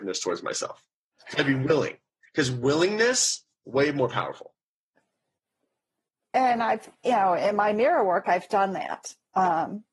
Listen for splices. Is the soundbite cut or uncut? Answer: uncut